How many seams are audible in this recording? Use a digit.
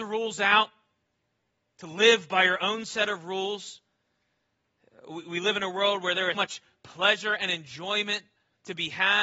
1